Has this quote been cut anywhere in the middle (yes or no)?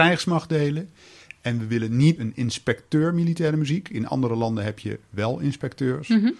yes